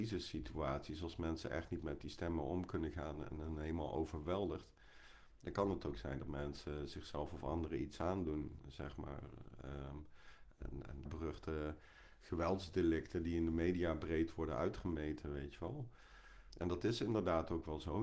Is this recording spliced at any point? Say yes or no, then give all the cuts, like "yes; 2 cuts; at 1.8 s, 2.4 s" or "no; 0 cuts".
yes; 2 cuts; at 11.0 s, 16.5 s